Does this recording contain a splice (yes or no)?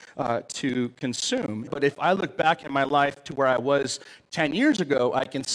yes